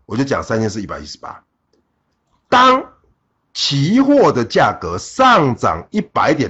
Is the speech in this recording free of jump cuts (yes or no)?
yes